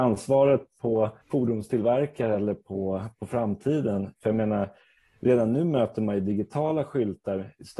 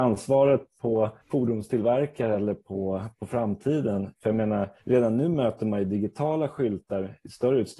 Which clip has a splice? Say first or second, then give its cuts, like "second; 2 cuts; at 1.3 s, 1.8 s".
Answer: second; 1 cut; at 4.8 s